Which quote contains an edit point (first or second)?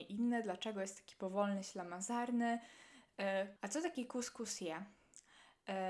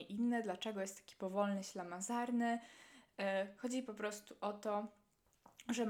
first